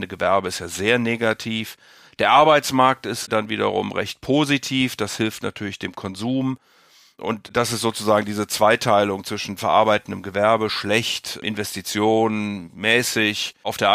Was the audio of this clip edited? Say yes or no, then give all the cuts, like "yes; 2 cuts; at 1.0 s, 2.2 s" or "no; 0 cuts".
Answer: no; 0 cuts